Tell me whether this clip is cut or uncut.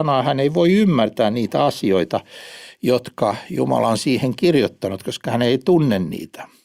uncut